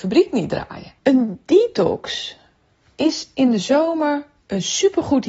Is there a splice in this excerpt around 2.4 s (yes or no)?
no